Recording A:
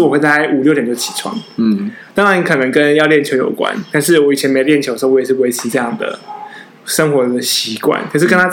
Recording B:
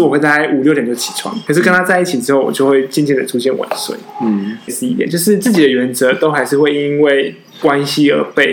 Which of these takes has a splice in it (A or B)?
B